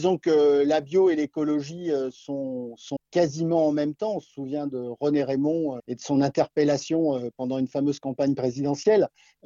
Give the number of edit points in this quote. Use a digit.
2